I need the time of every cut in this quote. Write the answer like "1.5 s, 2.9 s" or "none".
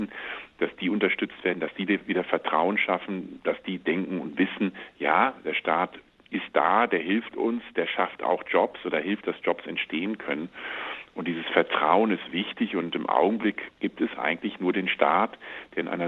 13.7 s